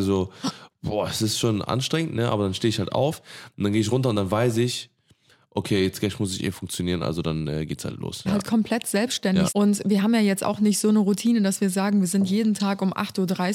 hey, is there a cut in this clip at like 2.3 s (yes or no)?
no